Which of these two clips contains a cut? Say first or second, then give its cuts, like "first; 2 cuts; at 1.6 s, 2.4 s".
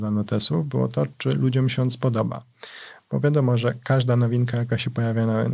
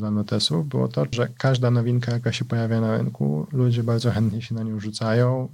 second; 1 cut; at 1.1 s